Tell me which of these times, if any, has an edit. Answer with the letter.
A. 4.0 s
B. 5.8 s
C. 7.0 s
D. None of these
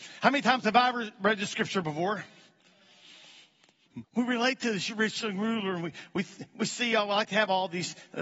A